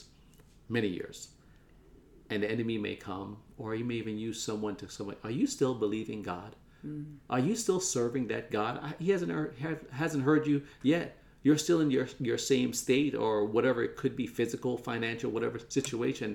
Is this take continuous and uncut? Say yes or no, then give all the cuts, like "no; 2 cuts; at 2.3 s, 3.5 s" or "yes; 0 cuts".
yes; 0 cuts